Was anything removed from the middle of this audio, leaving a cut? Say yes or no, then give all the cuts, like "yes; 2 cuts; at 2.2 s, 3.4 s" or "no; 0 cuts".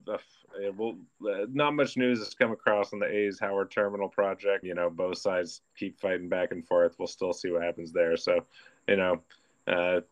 yes; 1 cut; at 4.6 s